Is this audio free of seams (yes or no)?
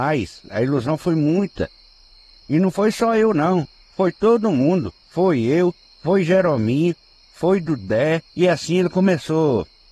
no